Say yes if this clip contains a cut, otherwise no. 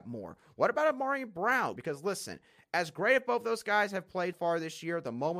yes